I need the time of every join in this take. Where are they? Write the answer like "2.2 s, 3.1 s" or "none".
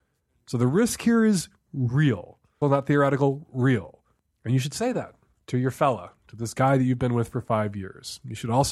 2.6 s